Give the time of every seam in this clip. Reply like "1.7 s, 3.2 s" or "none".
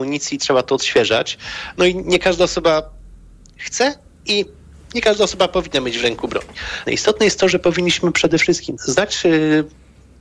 6.8 s, 8.8 s